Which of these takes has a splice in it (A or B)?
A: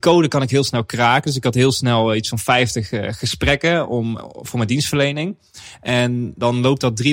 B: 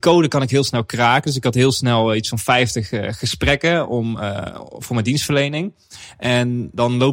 A